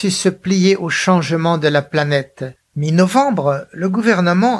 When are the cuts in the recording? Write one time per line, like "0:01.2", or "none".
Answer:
0:02.6